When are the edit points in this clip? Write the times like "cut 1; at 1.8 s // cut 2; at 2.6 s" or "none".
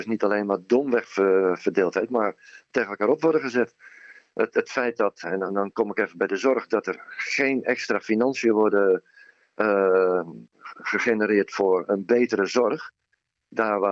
cut 1; at 5.2 s